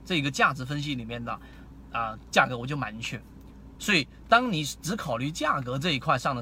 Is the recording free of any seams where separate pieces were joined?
no; 1 cut; at 3.7 s

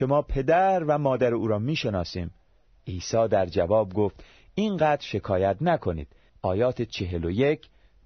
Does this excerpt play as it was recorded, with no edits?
no; 2 cuts; at 2.7 s, 6.3 s

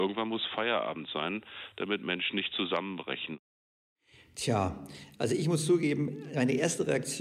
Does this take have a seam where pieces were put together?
no; 0 cuts

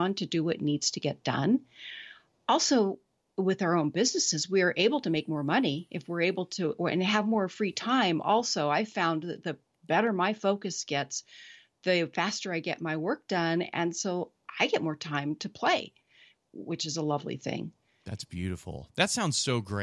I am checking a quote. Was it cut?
no; 0 cuts

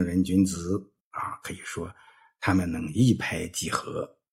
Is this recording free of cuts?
no; 1 cut; at 1.0 s

